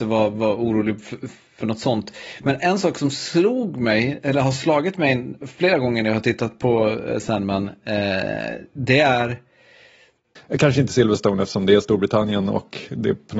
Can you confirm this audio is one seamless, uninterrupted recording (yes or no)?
no